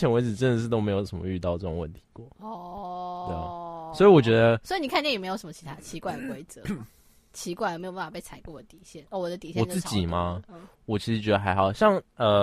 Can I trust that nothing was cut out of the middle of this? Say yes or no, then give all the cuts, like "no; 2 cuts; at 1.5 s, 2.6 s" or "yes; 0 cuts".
no; 1 cut; at 2.3 s